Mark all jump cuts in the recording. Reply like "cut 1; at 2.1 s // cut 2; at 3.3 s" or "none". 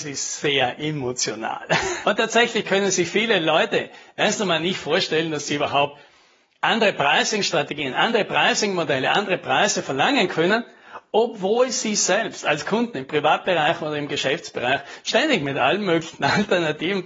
cut 1; at 2.0 s